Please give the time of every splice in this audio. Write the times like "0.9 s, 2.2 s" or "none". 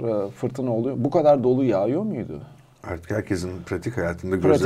none